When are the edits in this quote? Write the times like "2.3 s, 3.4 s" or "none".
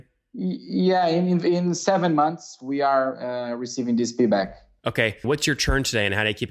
5.2 s